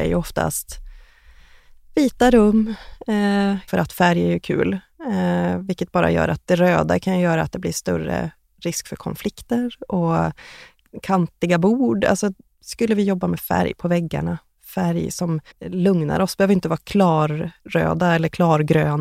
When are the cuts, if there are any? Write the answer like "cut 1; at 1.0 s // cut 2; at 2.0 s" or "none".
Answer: cut 1; at 3.7 s // cut 2; at 15.5 s // cut 3; at 17.6 s